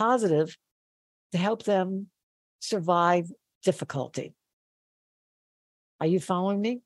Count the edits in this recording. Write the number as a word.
one